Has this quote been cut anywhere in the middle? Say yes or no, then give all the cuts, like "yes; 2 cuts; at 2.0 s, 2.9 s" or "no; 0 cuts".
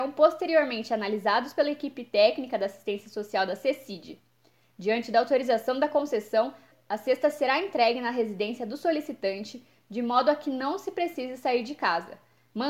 no; 0 cuts